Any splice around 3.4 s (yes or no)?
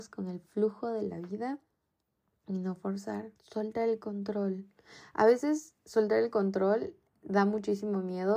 yes